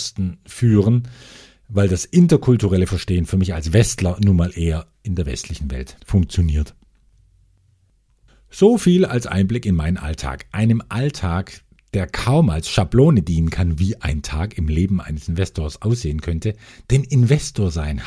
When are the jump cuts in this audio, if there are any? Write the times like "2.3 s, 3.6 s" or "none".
none